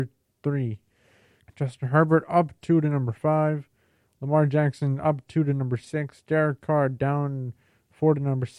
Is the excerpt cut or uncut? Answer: cut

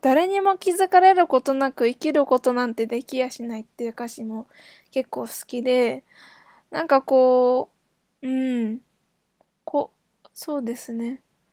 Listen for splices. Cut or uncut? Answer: uncut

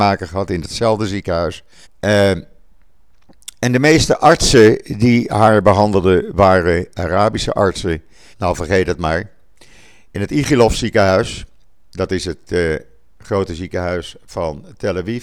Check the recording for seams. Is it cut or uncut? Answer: cut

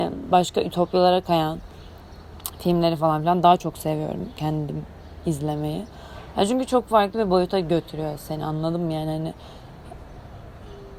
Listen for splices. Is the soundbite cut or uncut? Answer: uncut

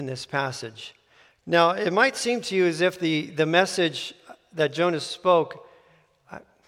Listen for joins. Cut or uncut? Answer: cut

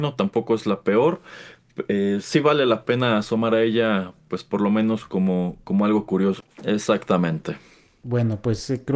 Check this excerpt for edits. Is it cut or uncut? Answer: cut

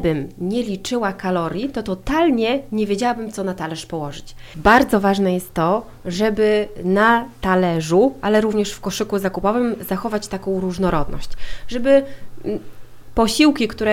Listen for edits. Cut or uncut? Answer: uncut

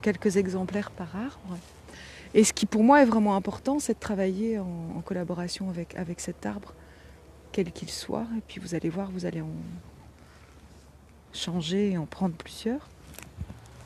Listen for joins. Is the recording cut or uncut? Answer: uncut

